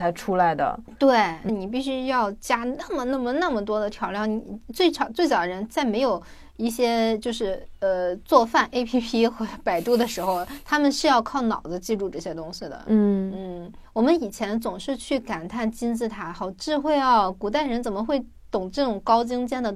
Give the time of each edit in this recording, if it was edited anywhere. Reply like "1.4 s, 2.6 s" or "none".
1.5 s